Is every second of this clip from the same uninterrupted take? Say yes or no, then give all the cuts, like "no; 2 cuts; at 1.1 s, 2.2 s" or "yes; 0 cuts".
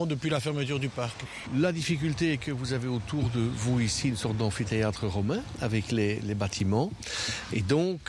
no; 1 cut; at 1.5 s